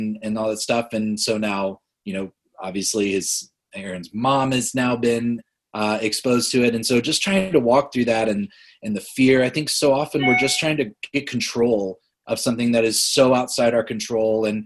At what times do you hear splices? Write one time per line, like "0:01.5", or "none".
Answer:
none